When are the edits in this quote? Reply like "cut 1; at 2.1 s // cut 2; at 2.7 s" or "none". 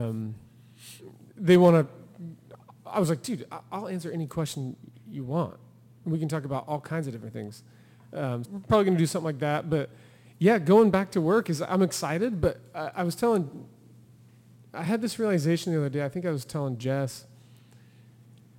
cut 1; at 8.4 s